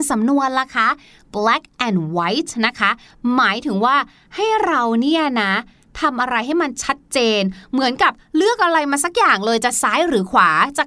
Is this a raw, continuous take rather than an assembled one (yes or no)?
yes